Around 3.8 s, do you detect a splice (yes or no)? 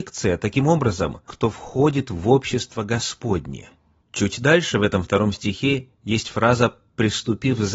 no